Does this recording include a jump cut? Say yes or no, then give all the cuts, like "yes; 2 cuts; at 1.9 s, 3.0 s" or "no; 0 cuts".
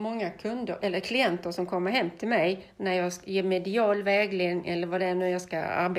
no; 0 cuts